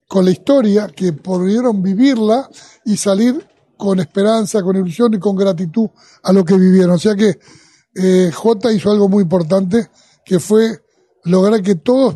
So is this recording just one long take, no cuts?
yes; 0 cuts

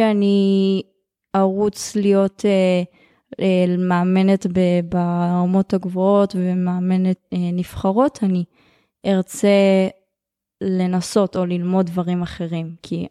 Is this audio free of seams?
yes; 0 cuts

